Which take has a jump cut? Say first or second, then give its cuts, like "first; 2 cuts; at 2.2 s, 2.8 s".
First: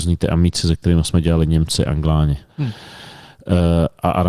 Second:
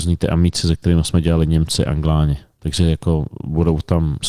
first; 1 cut; at 2.5 s